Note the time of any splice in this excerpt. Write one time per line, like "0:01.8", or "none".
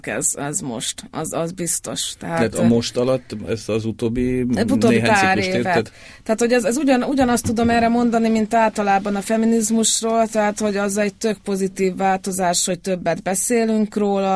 none

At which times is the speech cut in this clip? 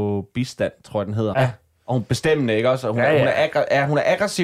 0:01.3

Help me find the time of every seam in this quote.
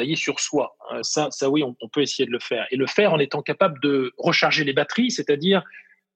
0:01.0

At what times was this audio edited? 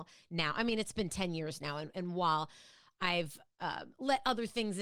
none

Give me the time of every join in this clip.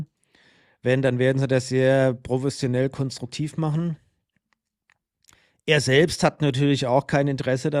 none

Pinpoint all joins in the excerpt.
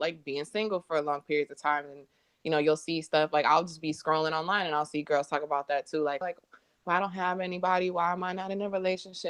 0:06.2

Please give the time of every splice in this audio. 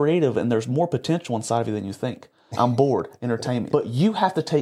0:02.5
0:03.7

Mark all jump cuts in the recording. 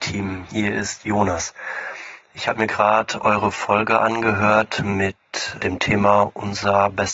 0:05.6

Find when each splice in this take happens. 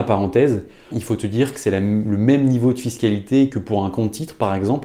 0:00.9

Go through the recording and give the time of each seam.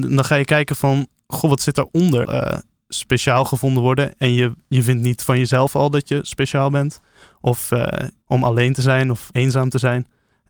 0:02.3
0:08.2

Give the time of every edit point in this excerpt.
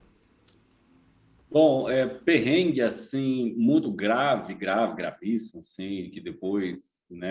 none

